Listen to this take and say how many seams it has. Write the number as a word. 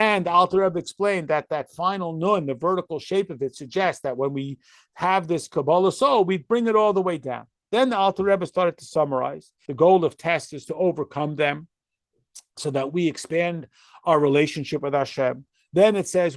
one